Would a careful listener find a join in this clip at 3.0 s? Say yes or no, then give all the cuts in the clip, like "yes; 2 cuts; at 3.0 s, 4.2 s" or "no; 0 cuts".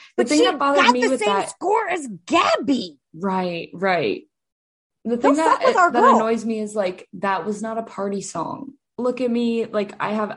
yes; 1 cut; at 3.0 s